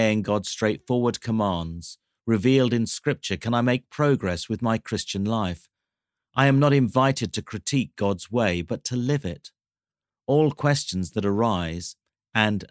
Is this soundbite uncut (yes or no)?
yes